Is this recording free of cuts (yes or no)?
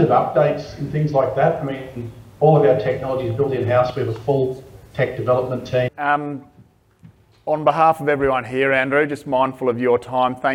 no